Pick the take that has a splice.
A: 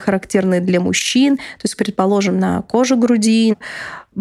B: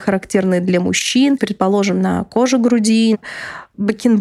B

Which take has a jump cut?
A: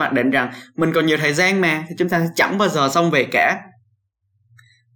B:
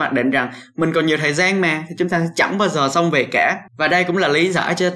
B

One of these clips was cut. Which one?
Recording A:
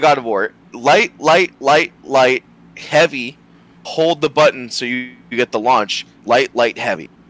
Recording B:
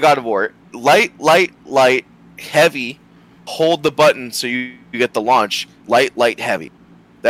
B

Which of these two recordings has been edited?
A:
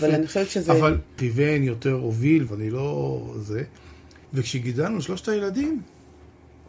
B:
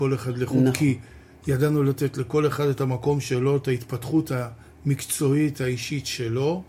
A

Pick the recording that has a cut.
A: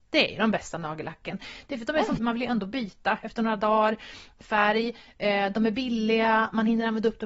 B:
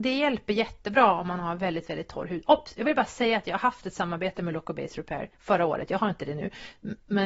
A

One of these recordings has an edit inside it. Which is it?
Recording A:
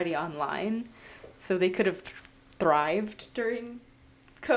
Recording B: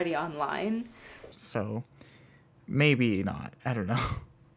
B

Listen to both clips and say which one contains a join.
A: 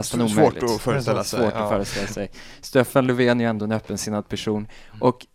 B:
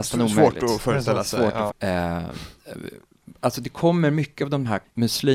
B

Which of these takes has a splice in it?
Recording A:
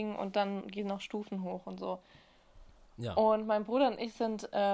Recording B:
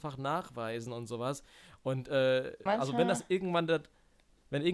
B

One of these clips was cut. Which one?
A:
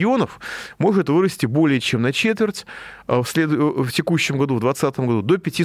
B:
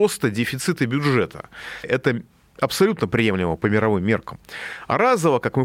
B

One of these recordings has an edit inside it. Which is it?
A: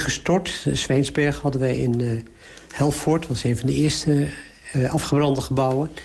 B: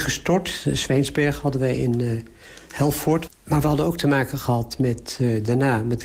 B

